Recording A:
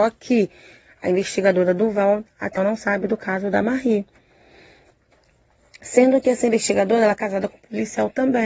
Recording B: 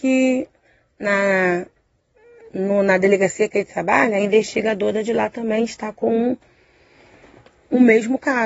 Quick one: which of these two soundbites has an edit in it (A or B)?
A